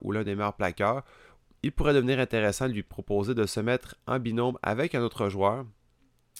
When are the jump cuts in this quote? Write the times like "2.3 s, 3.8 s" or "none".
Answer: 1.4 s